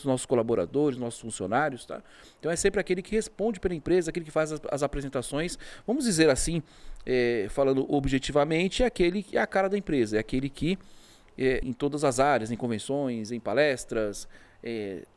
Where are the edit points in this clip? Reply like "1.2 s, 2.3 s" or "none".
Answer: 11.6 s

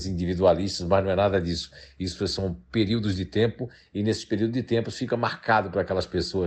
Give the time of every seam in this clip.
none

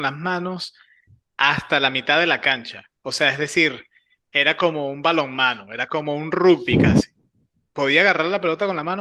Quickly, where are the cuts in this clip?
none

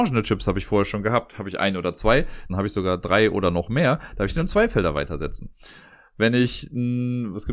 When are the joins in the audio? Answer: 2.5 s

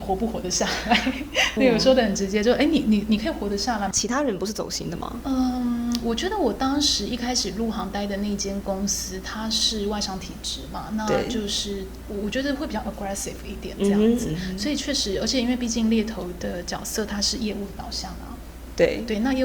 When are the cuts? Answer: 1.6 s, 3.9 s

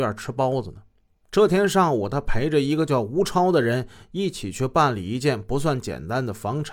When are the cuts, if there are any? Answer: 1.2 s

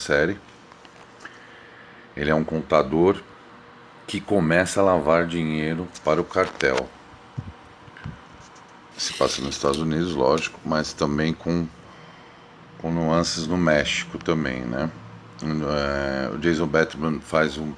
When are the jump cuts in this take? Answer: 8.9 s

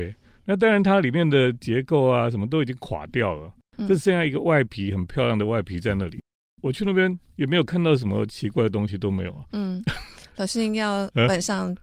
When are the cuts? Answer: none

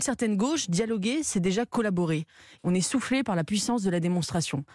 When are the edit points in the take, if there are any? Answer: 2.6 s

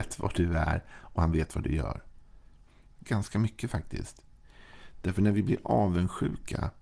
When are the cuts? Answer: 2.9 s

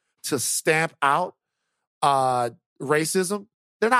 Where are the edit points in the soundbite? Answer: none

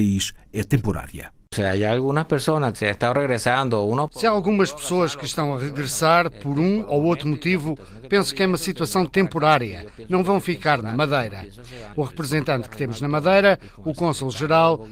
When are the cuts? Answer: 11.9 s

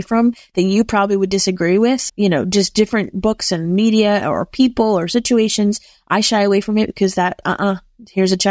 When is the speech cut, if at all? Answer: 2.1 s, 7.4 s

